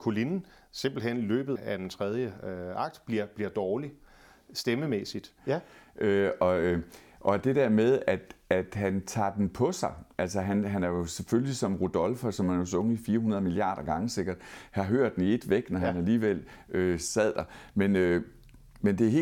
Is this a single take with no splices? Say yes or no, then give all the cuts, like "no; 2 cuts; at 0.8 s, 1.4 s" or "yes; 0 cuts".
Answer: no; 2 cuts; at 1.6 s, 5.4 s